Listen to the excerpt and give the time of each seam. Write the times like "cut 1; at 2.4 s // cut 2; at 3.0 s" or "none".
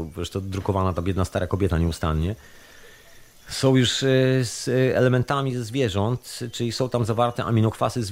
none